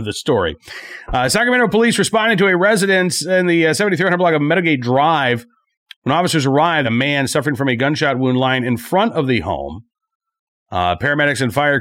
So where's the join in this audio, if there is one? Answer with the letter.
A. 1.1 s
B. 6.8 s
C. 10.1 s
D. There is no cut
B